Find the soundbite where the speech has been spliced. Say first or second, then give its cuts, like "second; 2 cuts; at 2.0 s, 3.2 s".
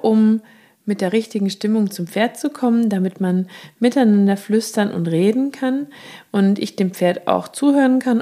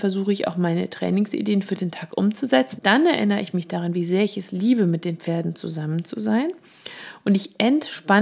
second; 1 cut; at 2.8 s